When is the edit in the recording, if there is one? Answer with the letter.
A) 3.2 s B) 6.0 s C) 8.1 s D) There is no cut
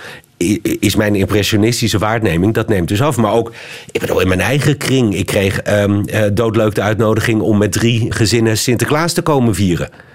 C